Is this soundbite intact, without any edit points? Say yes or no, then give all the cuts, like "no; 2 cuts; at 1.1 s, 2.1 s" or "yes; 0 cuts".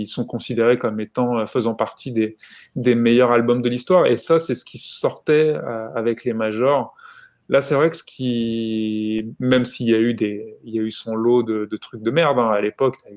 yes; 0 cuts